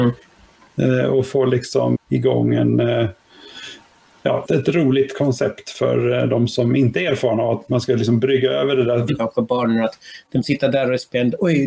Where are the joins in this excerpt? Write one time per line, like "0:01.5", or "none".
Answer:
0:01.9
0:04.5
0:09.1